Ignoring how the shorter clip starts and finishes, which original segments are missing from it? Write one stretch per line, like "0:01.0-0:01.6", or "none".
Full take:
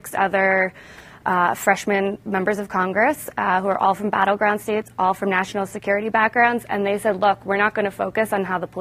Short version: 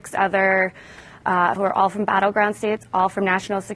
0:01.6-0:03.6